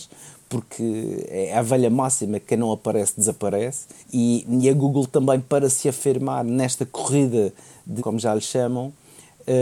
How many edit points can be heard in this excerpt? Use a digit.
2